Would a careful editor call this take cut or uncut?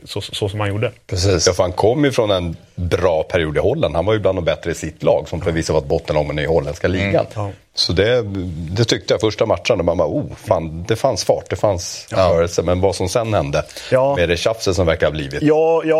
uncut